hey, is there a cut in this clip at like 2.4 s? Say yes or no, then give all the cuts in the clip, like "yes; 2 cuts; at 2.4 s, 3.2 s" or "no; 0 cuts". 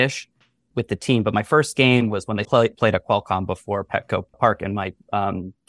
yes; 2 cuts; at 2.4 s, 4.3 s